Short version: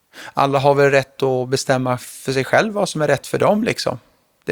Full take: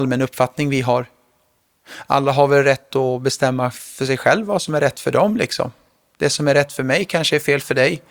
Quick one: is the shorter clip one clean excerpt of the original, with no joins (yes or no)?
yes